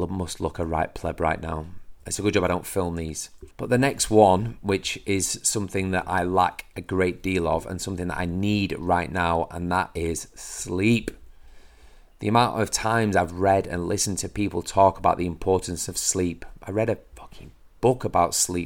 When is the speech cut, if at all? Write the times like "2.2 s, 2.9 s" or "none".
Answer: 3.5 s